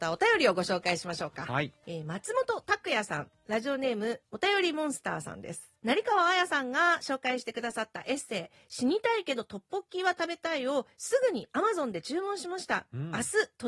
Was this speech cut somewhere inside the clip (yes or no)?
no